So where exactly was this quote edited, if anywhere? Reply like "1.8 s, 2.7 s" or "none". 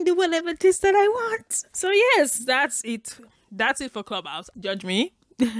4.5 s